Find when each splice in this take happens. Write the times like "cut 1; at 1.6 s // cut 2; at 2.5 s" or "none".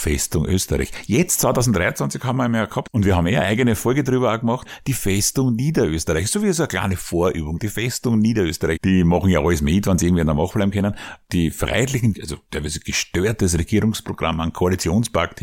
cut 1; at 8.8 s // cut 2; at 12.1 s